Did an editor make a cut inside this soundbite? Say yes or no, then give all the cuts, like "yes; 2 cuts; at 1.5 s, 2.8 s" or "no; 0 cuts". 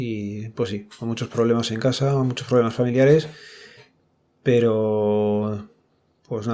no; 0 cuts